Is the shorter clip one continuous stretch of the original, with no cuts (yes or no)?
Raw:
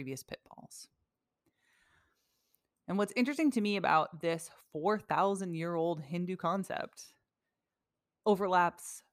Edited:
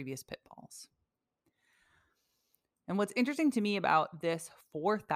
yes